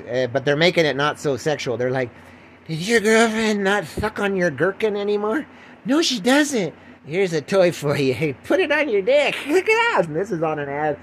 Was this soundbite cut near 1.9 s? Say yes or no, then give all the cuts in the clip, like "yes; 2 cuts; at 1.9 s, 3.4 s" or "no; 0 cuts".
no; 2 cuts; at 7.0 s, 10.0 s